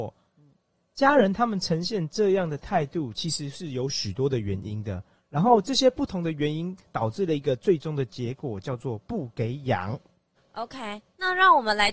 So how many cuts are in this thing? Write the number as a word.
one